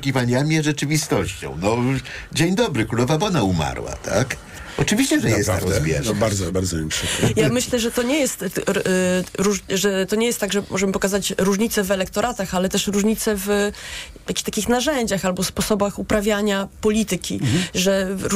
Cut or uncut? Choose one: uncut